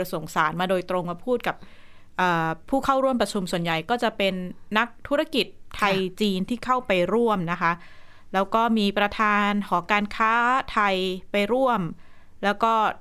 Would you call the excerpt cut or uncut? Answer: uncut